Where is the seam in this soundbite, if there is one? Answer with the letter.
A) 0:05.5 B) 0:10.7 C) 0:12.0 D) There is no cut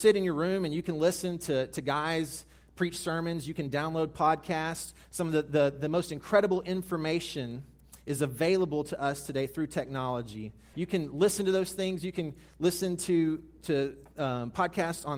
B